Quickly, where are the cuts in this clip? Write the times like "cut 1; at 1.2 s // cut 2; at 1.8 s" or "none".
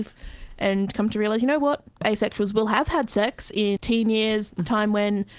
cut 1; at 2.0 s // cut 2; at 3.8 s

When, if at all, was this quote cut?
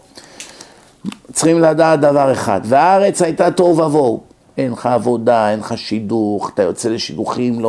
cut 1; at 4.4 s

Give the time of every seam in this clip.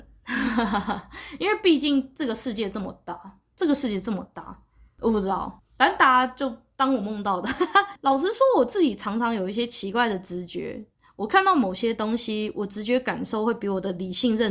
none

